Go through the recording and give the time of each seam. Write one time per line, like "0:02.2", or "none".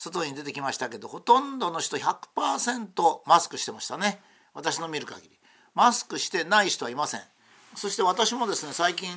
none